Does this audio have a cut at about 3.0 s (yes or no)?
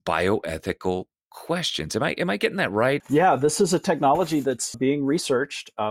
yes